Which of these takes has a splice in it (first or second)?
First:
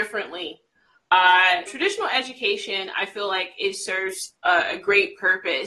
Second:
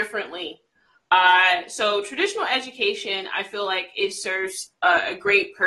first